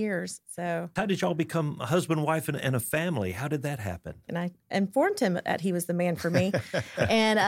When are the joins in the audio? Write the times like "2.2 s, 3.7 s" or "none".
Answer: 1.0 s, 4.3 s